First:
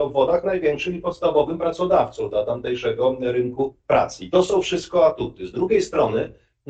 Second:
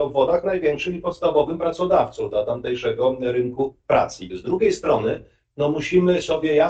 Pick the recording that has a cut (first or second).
second